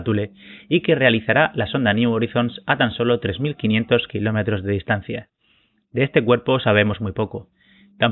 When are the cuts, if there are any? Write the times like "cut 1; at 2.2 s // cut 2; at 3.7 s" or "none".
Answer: none